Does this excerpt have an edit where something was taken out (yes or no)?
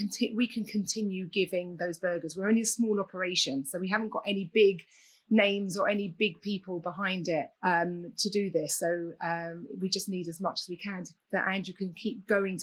yes